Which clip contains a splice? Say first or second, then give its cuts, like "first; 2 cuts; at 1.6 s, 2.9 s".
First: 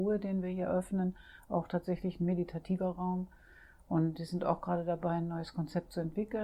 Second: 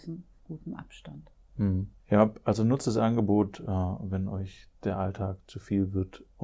second; 1 cut; at 2.0 s